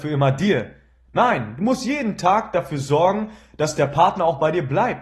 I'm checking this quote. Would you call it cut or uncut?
uncut